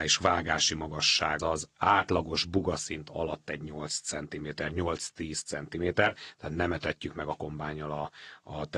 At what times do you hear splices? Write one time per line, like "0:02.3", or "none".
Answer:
0:01.4